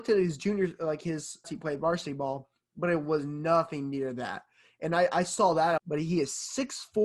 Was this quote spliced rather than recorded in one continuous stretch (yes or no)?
yes